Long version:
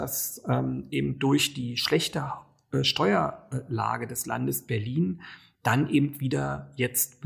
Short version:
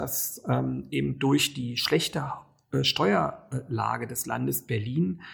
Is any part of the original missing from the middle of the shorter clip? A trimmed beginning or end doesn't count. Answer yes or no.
no